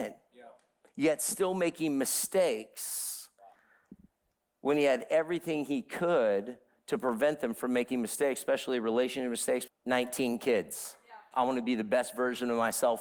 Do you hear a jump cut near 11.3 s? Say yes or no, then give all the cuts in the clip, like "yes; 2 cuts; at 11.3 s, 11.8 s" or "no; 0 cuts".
yes; 2 cuts; at 9.7 s, 11.3 s